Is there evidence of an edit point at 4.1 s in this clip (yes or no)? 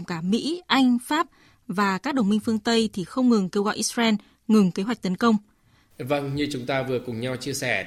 no